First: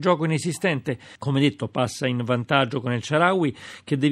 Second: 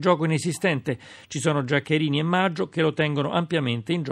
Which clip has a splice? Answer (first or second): first